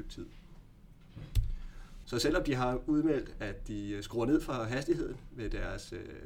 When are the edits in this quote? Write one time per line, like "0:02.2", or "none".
0:02.0